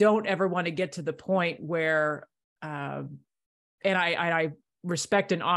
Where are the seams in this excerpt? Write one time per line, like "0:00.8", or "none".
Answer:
none